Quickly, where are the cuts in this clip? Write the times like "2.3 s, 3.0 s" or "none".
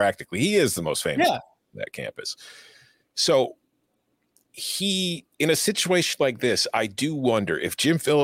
5.3 s